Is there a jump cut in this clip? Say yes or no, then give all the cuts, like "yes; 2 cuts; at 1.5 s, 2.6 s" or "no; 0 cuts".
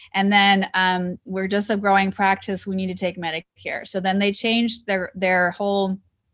yes; 1 cut; at 1.3 s